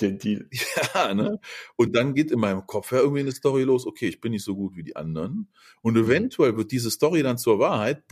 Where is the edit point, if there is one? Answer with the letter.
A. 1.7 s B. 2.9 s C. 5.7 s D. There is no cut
D